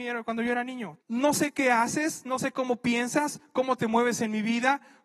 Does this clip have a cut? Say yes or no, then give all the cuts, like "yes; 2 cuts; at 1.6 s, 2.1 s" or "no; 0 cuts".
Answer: yes; 1 cut; at 1.0 s